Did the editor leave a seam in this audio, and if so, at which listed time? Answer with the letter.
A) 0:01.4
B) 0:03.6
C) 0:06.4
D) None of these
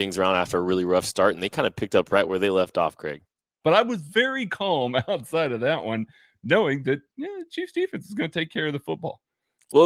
B